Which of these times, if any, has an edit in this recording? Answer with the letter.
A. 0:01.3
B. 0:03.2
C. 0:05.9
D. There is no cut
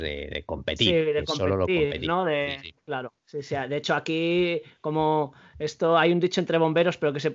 B